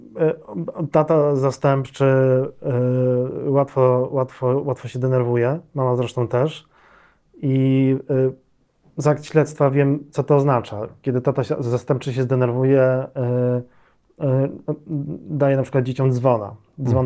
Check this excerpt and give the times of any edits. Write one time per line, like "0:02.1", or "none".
none